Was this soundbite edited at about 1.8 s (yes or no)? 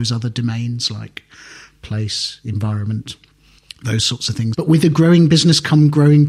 no